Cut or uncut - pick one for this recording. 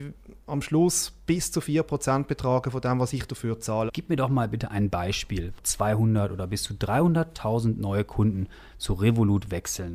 cut